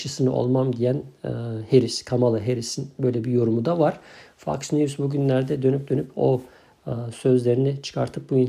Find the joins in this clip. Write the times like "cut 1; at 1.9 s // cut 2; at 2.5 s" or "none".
none